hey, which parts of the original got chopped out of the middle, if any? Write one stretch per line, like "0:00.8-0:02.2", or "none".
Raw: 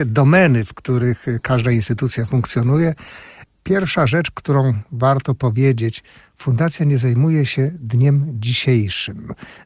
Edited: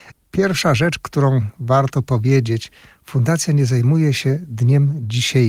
none